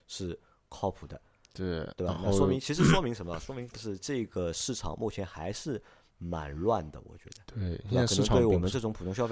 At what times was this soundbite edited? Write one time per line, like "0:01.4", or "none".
none